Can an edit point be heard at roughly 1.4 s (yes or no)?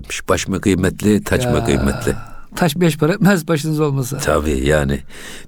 no